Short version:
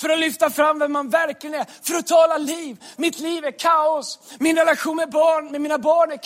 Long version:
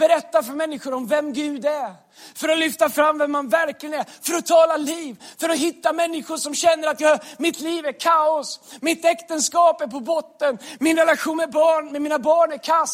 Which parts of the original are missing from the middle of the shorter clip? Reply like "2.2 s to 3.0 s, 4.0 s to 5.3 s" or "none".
5.3 s to 7.4 s, 8.8 s to 10.8 s

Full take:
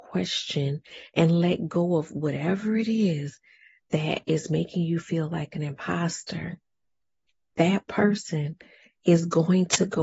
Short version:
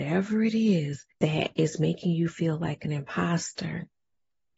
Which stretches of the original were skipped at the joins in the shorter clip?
3.5 s to 3.8 s

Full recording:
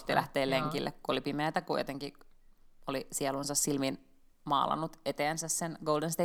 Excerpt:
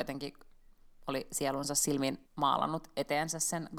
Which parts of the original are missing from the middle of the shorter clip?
4.0 s to 4.3 s

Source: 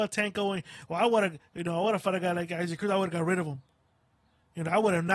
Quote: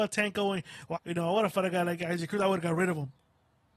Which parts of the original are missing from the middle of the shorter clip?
1.0 s to 1.5 s

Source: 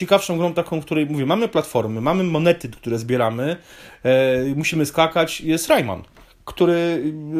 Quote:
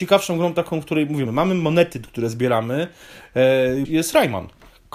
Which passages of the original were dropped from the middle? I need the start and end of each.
1.2 s to 1.9 s, 4.5 s to 5.4 s

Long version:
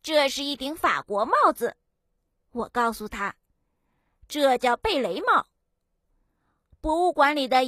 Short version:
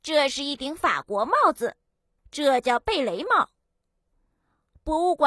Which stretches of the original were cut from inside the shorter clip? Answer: 2.2 s to 4.2 s

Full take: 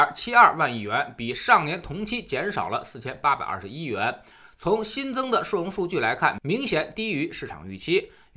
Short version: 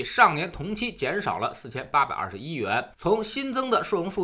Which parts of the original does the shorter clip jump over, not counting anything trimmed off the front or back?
4.2 s to 4.5 s

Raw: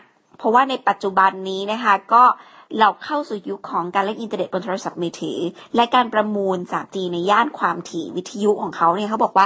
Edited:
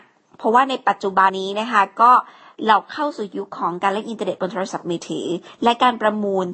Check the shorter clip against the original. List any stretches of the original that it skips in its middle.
1.3 s to 1.4 s

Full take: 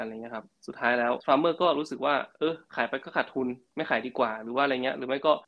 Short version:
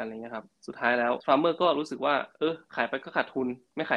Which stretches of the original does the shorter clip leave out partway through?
none

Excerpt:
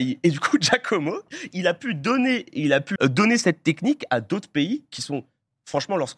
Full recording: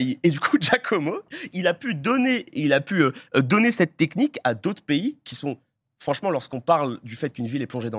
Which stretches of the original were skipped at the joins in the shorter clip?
3.0 s to 3.3 s

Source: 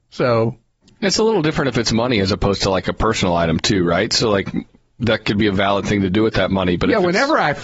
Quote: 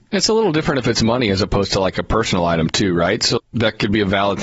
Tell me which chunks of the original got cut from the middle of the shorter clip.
4.3 s to 4.8 s

